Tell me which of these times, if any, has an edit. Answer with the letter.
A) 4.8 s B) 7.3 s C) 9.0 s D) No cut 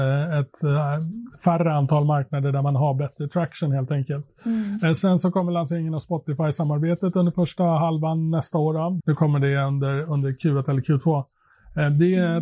C